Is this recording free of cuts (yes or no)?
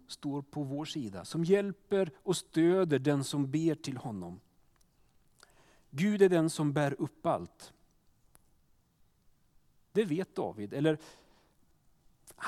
yes